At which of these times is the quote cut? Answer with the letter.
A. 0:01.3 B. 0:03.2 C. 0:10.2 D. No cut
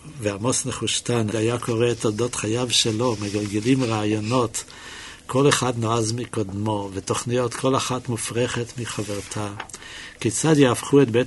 A